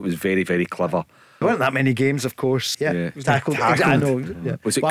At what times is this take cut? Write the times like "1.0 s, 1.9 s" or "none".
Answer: 1.4 s, 2.7 s